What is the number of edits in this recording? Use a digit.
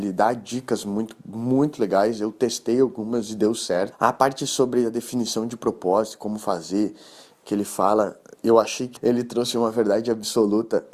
2